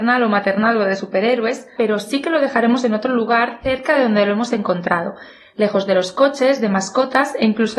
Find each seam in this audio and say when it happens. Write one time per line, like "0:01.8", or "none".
0:01.8

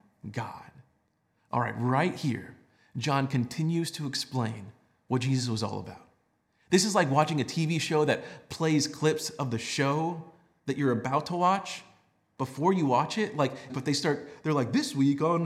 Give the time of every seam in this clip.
0:13.7

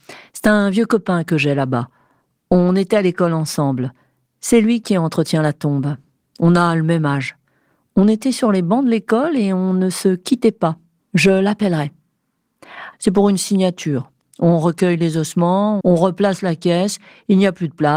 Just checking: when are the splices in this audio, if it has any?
0:11.0
0:12.9
0:15.8

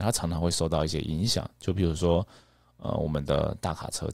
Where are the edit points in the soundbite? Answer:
none

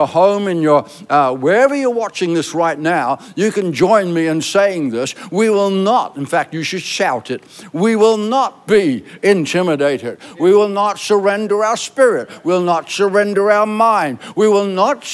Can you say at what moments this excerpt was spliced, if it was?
none

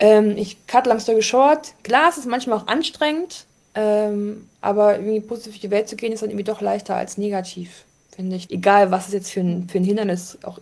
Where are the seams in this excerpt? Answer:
0:08.5

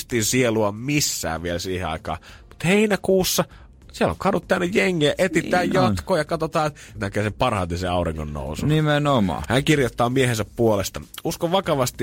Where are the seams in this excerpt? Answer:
0:07.0
0:09.4

